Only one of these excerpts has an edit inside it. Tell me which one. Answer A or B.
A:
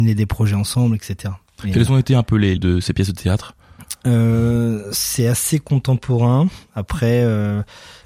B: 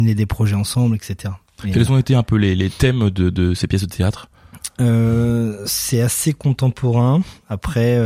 A